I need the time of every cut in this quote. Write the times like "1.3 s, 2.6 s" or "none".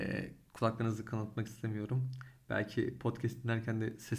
none